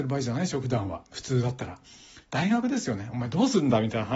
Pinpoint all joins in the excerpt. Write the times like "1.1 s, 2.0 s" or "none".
none